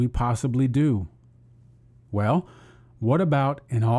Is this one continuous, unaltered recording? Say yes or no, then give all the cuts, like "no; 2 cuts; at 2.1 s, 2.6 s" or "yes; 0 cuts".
no; 1 cut; at 2.1 s